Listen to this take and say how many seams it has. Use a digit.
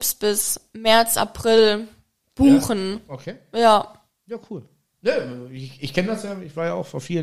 0